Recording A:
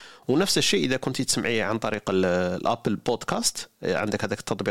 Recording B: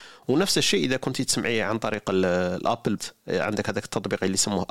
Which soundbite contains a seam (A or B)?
B